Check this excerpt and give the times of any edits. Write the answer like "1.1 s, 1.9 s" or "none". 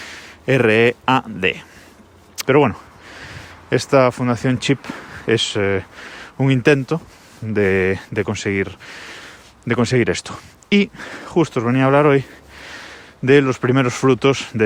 2.4 s